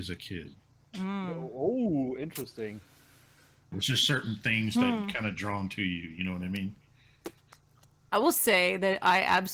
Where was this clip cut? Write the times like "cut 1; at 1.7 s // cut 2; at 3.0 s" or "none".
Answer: cut 1; at 3.7 s